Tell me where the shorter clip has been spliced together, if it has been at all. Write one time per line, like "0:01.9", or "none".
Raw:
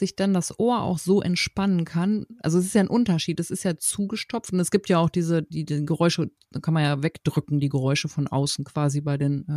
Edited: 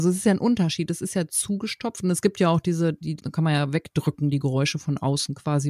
0:03.2

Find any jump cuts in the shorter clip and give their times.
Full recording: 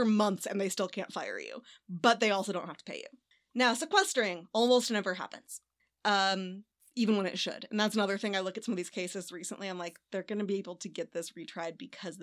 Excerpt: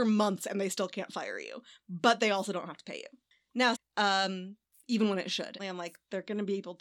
0:03.7
0:05.6

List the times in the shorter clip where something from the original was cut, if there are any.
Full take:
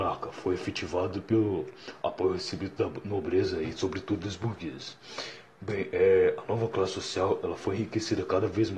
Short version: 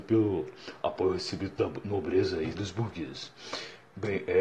0:02.5

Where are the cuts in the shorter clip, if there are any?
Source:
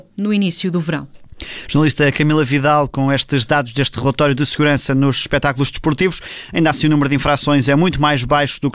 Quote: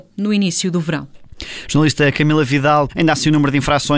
0:02.9

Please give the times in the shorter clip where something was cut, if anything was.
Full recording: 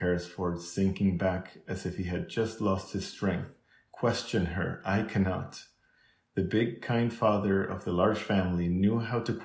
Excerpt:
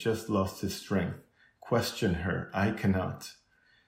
none

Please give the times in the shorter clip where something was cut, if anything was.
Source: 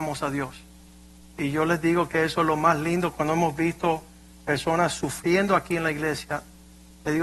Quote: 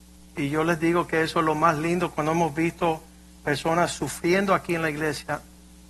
none

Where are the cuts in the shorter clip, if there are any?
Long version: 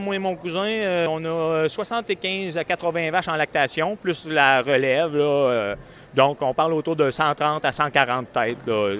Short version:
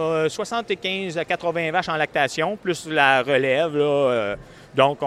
none

